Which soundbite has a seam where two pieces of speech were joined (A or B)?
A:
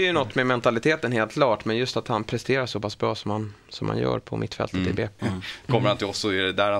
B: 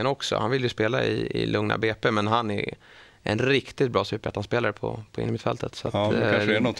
A